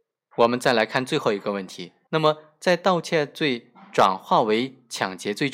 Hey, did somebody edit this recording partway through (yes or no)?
yes